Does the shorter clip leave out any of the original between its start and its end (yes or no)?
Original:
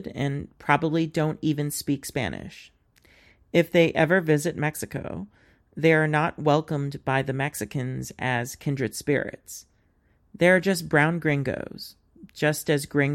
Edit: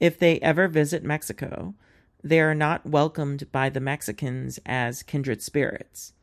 no